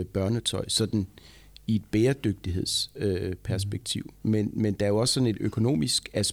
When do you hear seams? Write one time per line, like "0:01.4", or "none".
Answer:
none